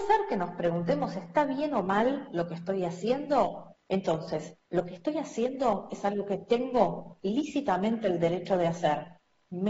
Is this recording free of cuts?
no; 1 cut; at 3.8 s

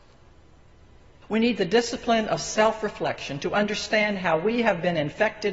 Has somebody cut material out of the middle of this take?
yes; 1 cut; at 1.2 s

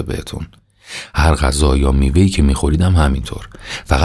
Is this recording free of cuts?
yes; 0 cuts

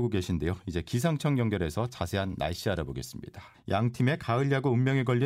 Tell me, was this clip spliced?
yes; 1 cut; at 3.5 s

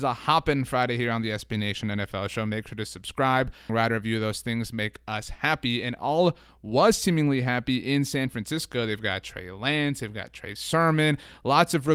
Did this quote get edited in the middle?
yes; 1 cut; at 3.7 s

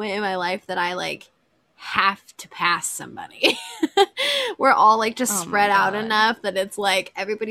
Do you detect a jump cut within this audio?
no; 0 cuts

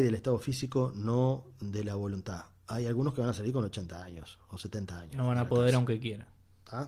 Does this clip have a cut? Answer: no; 0 cuts

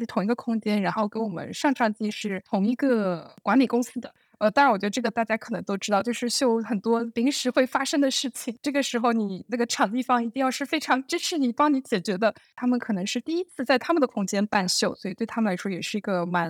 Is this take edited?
yes; 1 cut; at 12.4 s

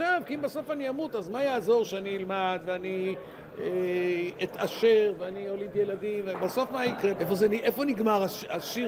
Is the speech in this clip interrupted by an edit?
yes; 1 cut; at 7.1 s

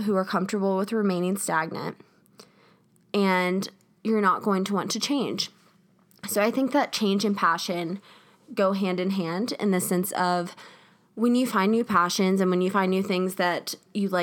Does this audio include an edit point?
no; 0 cuts

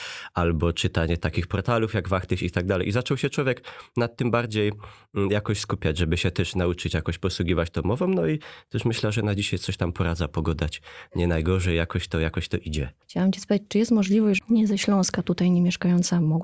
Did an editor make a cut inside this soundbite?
yes; 2 cuts; at 13.0 s, 14.4 s

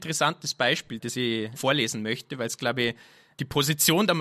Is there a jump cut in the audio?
no; 0 cuts

